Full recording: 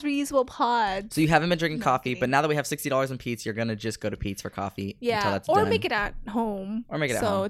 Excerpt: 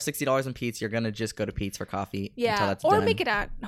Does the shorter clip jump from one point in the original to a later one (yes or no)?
no